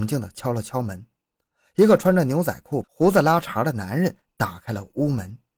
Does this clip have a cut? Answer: yes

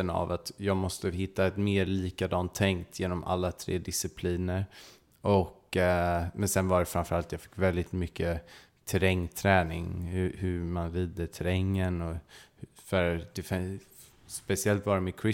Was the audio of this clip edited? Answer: no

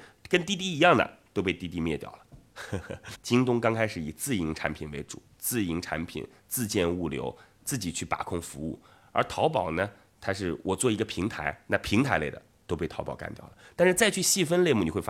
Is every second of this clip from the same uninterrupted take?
no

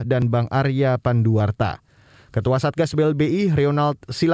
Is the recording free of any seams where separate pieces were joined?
yes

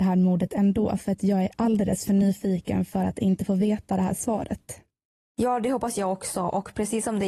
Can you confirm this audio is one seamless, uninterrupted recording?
yes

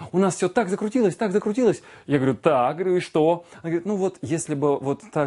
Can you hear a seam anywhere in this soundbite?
no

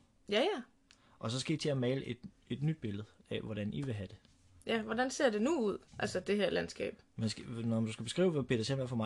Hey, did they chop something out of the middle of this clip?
yes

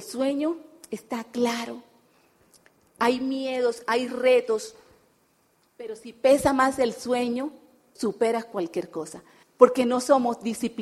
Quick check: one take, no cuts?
no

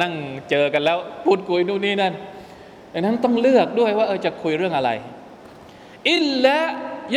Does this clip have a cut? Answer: no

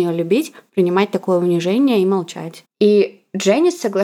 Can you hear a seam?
yes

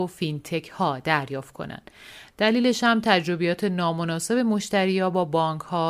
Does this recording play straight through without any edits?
yes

